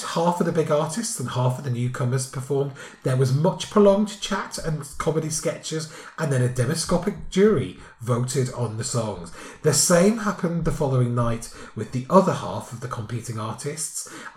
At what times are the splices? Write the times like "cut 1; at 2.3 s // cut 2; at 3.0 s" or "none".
none